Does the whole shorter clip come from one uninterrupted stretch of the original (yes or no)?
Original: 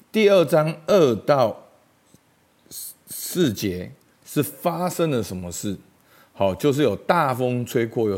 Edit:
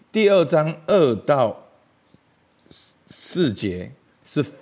yes